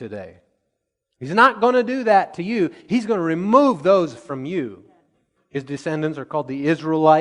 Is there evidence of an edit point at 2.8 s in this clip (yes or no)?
no